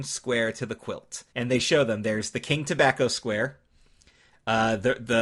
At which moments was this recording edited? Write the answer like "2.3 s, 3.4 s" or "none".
1.3 s